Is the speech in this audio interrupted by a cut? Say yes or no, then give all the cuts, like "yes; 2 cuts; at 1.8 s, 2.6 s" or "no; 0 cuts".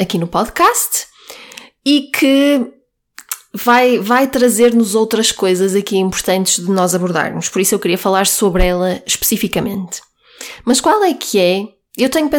no; 0 cuts